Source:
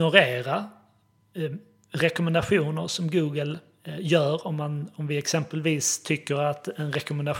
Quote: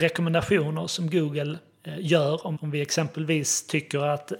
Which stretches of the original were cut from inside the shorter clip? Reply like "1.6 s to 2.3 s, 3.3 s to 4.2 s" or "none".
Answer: 4.6 s to 4.9 s